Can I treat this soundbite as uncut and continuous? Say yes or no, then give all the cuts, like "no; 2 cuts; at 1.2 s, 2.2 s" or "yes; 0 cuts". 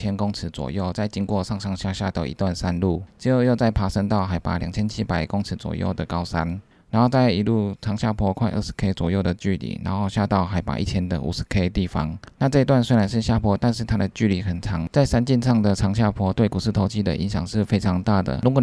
yes; 0 cuts